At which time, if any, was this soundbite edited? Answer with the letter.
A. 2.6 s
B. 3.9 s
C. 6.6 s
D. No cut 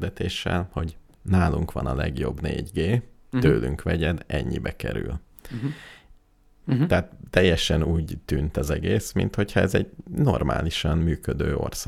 C